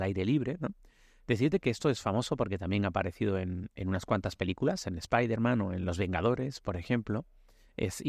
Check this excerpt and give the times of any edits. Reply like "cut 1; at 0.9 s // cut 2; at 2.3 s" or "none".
none